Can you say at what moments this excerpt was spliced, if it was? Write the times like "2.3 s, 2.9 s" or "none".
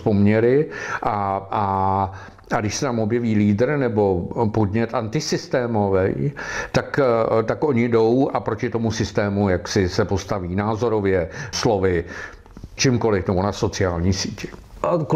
11.5 s, 12.8 s